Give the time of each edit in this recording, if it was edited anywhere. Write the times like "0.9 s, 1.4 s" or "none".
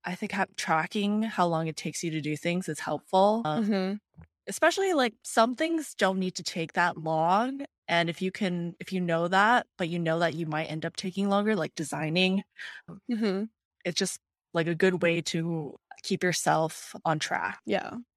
none